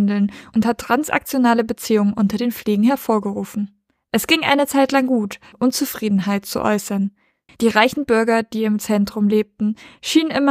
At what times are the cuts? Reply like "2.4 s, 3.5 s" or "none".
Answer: 5.5 s, 7.5 s

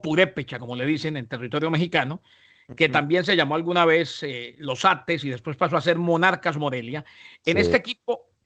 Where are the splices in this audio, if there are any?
none

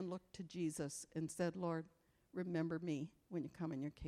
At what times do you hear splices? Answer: none

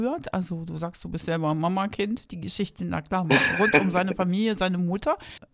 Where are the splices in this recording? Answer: none

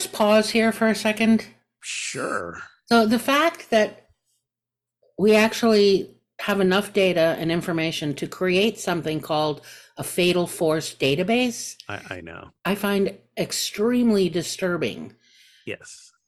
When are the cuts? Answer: 12.6 s

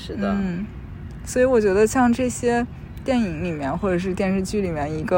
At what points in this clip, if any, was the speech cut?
none

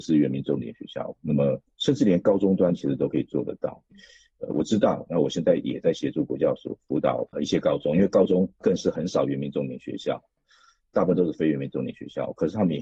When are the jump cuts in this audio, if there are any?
1.1 s

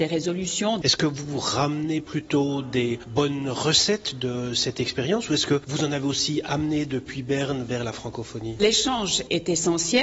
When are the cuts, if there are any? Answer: none

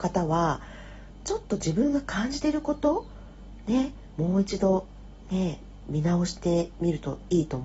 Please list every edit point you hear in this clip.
none

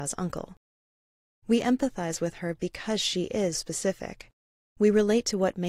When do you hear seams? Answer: 3.5 s

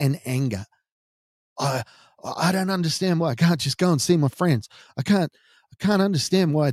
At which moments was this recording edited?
none

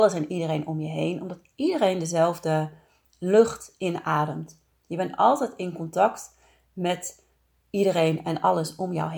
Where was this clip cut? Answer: none

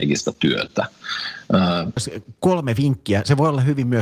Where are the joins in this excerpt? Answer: 2.0 s

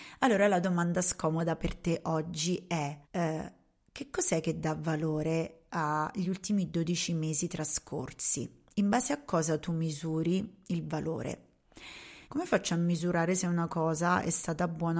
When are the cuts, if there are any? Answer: 3.0 s, 12.2 s

